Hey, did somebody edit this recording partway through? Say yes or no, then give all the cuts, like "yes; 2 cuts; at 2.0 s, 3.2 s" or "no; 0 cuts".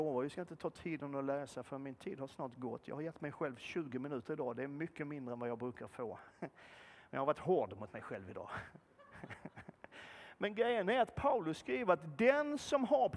no; 0 cuts